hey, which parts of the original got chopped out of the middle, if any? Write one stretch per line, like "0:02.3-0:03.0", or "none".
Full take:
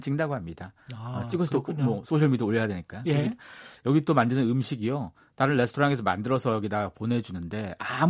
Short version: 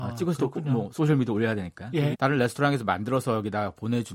0:03.2-0:05.3

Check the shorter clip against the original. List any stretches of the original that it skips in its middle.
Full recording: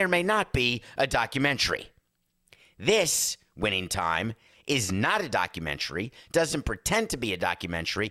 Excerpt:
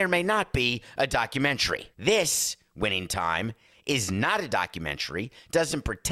0:01.9-0:02.7

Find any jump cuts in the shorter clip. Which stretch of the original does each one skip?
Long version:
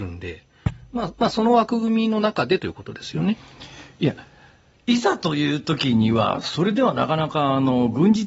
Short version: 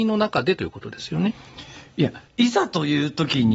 0:04.3-0:04.8

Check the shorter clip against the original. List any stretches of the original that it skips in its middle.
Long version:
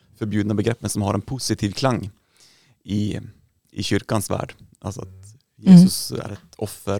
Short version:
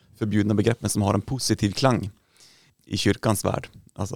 0:02.7-0:03.6

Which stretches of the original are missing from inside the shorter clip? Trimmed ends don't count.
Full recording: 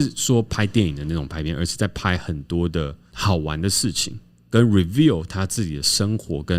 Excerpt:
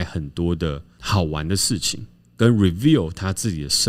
none

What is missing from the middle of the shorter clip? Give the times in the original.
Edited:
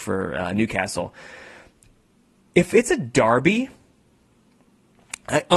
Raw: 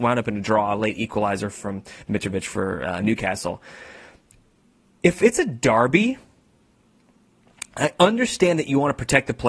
none

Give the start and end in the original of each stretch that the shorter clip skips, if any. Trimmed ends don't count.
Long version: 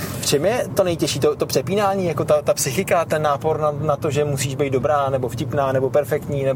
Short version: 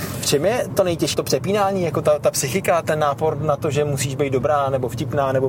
0:01.1-0:01.4
0:03.6-0:03.7

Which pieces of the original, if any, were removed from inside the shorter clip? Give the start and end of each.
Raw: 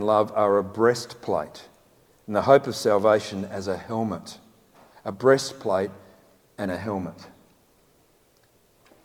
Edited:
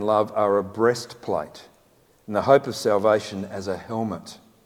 none

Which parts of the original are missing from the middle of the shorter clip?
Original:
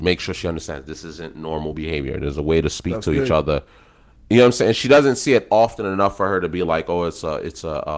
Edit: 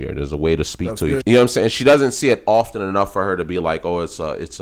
0:03.3-0:04.2

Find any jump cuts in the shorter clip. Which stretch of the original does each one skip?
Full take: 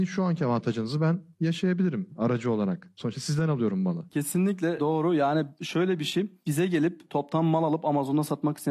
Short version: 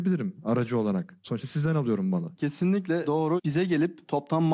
0:05.1-0:06.4

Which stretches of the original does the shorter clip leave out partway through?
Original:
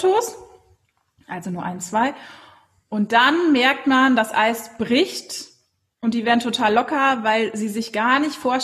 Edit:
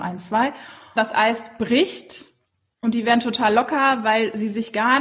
0:02.6-0:04.2

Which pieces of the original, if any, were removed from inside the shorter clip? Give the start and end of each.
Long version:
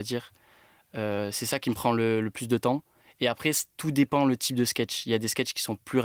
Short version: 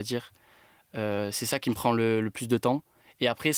none

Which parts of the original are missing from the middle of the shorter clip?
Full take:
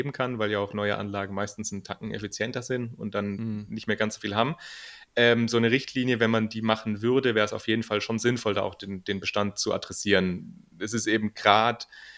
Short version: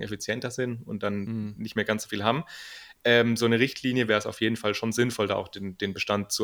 0:06.2-0:07.3

